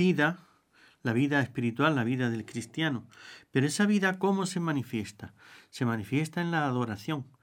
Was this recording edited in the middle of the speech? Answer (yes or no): no